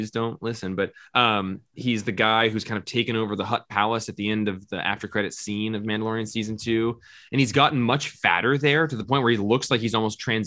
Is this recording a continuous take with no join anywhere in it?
yes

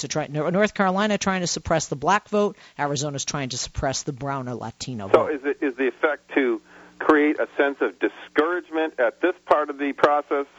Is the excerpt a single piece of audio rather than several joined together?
yes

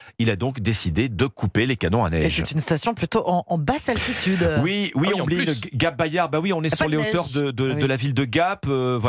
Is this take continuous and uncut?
yes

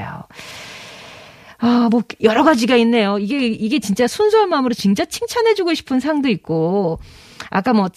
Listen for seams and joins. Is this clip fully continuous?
yes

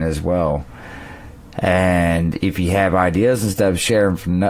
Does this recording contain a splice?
no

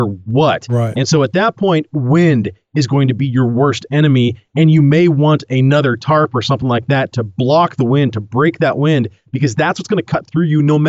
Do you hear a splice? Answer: no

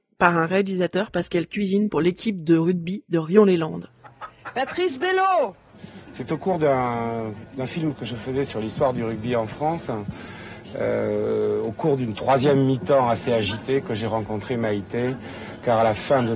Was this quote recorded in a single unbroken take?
yes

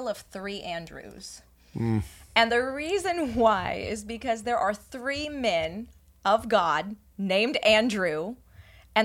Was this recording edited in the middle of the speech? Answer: no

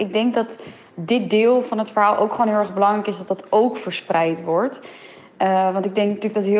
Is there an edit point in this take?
no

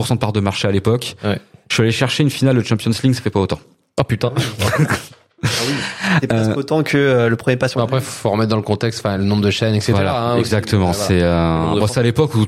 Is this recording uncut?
yes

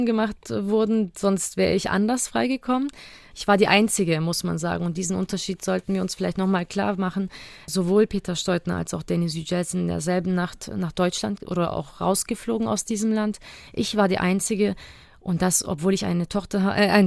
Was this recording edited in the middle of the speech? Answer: yes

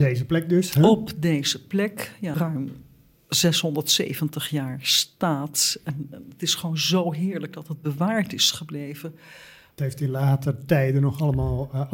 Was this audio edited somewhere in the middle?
yes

